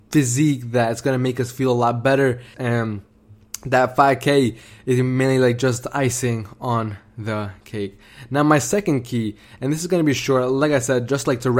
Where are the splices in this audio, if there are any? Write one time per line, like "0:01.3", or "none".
0:02.5